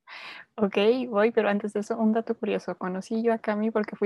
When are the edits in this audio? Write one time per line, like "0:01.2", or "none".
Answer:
none